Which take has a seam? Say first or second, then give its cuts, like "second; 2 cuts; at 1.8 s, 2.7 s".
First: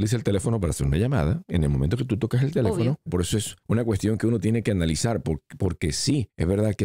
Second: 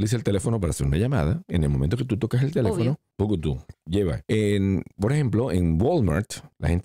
first; 1 cut; at 3.1 s